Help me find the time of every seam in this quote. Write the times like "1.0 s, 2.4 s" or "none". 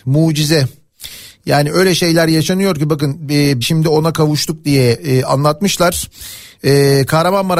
3.6 s, 6.6 s

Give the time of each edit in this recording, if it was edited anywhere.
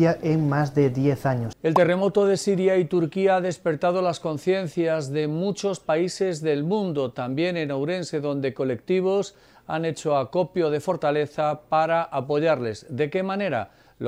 1.5 s

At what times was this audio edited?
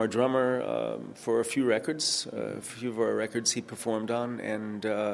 none

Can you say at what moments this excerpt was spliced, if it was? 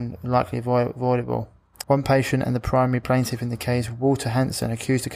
1.8 s

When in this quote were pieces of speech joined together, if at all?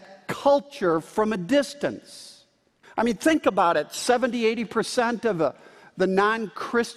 2.8 s

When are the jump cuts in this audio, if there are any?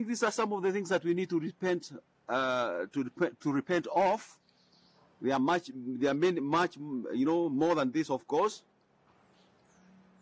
none

